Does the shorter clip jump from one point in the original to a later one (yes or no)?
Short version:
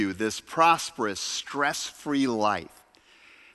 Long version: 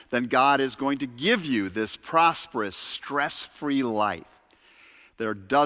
no